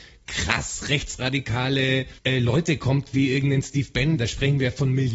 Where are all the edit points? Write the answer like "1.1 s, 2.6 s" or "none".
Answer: 2.2 s, 4.2 s